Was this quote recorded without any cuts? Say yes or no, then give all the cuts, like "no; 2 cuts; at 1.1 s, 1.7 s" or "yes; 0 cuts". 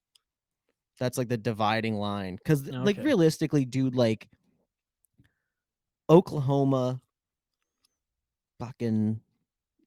yes; 0 cuts